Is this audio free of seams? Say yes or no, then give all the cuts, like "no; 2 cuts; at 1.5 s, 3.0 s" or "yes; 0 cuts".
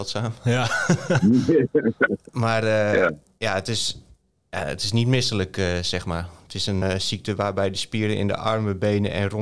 no; 1 cut; at 6.8 s